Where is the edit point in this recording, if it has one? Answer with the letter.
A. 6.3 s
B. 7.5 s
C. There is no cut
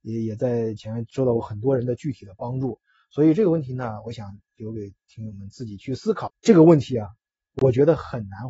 A